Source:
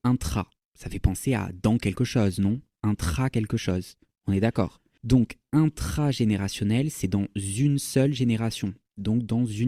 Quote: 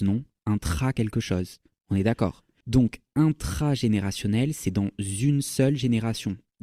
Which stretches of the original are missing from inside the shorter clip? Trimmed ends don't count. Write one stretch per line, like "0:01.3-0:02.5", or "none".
none